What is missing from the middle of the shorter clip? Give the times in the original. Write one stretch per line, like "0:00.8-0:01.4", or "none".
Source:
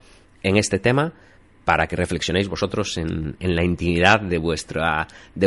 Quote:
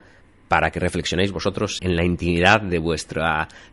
0:02.9-0:03.4